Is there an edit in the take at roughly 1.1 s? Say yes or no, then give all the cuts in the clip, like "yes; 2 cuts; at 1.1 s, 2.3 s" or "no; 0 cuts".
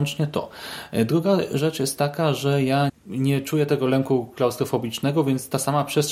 no; 1 cut; at 2.9 s